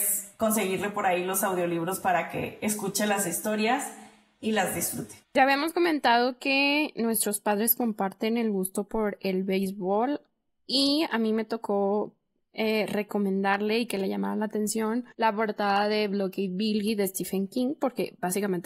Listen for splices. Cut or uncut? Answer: cut